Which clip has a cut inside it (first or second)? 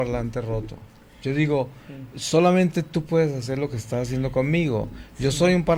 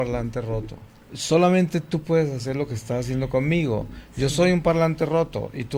second